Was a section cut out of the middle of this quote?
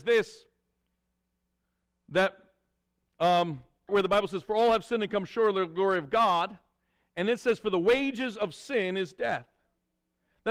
yes; 1 cut; at 3.9 s

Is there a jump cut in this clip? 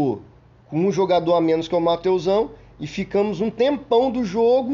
no; 0 cuts

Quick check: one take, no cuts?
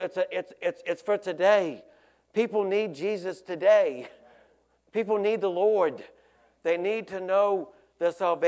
yes; 0 cuts

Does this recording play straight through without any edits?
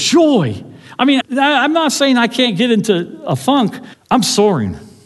no; 2 cuts; at 1.2 s, 3.9 s

